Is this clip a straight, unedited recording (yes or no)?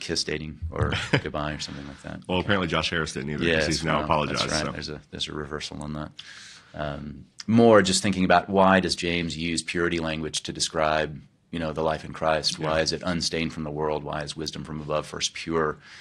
yes